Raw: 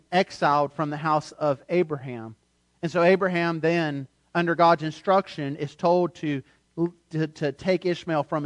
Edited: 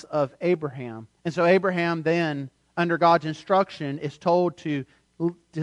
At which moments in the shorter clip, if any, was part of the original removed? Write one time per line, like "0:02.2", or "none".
0:01.2